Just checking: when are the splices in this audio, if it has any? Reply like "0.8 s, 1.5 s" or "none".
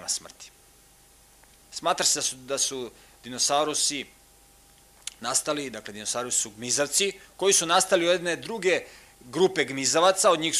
1.6 s